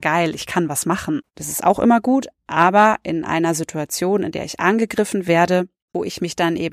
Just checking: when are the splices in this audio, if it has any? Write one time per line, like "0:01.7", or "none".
0:01.3